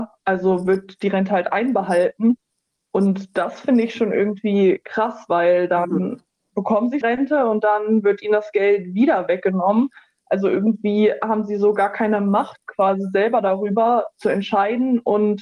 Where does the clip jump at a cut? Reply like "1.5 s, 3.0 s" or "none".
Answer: 7.0 s